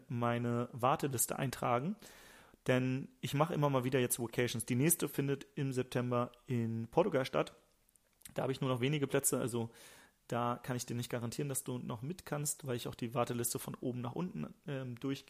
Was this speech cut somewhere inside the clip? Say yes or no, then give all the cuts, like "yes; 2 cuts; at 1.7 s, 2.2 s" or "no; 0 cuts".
no; 0 cuts